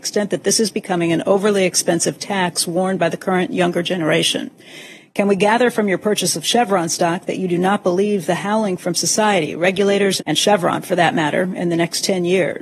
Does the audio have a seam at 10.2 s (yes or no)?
yes